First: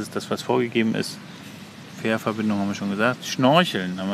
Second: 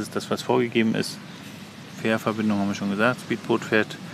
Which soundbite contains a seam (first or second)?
first